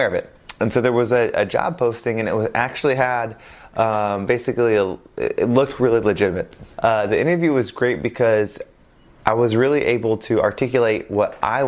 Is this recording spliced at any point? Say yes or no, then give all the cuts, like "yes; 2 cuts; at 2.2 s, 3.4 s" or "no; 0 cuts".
yes; 1 cut; at 6.7 s